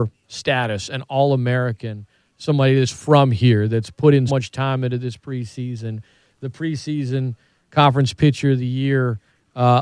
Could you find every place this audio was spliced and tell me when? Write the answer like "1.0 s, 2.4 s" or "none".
4.3 s